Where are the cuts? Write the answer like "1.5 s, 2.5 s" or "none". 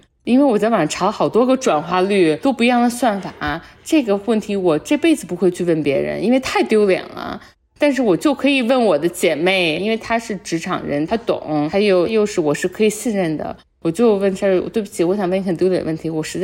11.1 s